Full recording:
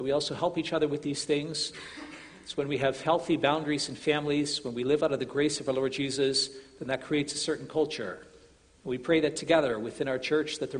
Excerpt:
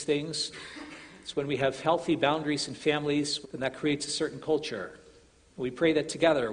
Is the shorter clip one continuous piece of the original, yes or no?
no